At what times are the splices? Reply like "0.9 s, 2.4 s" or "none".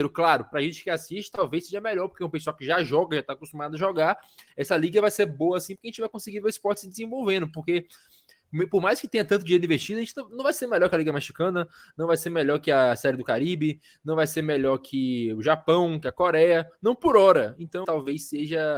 4.5 s, 17.8 s